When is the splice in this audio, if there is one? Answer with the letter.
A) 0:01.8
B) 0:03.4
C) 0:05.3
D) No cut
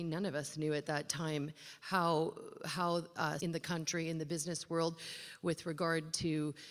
B